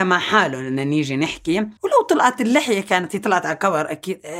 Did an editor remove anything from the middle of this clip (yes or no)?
yes